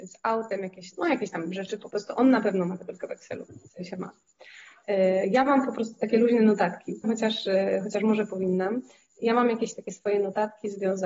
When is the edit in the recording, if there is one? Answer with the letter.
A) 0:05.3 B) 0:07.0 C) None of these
B